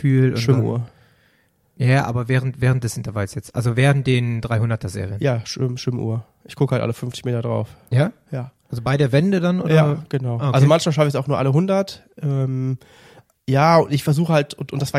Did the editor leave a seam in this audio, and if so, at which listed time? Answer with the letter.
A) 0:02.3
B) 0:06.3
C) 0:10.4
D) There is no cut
D